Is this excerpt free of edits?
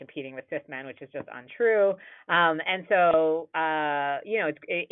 yes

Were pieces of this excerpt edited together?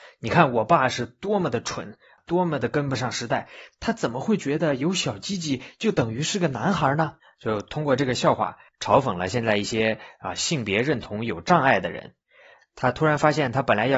no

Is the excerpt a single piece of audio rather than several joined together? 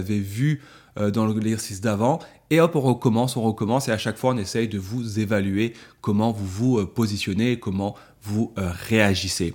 yes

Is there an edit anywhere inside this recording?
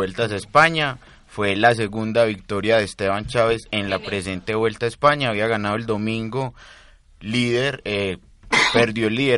no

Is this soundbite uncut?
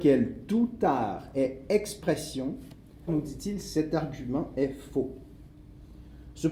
no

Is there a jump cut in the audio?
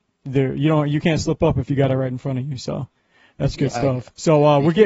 no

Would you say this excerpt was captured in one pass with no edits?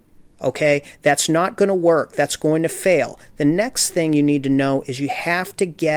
yes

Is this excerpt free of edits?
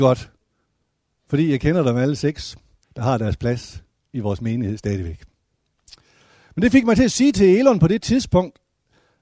no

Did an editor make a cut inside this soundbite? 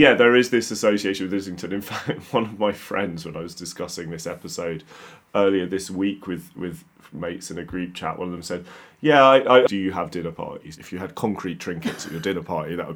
yes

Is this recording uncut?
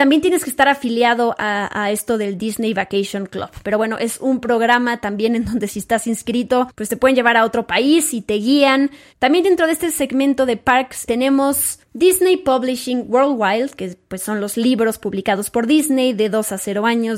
no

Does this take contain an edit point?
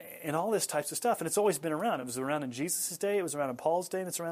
no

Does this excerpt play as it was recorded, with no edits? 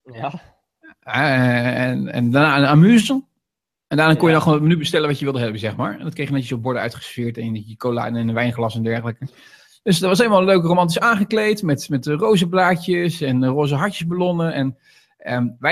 yes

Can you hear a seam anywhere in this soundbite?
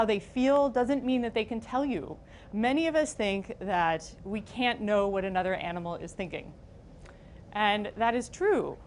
yes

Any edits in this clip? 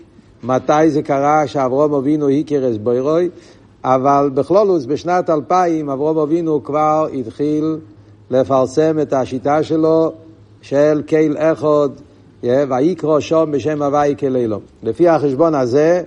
yes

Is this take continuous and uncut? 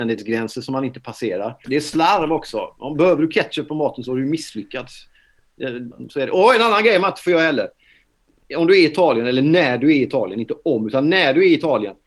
no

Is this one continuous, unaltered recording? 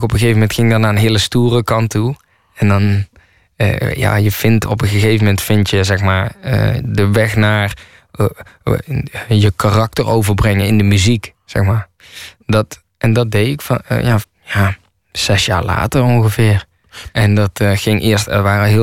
no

